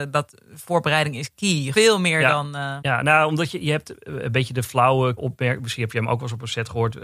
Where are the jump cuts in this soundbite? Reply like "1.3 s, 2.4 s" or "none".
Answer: 1.7 s, 2.8 s, 5.2 s